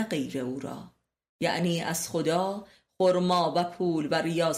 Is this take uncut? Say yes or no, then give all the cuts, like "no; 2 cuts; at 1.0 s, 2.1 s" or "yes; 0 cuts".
yes; 0 cuts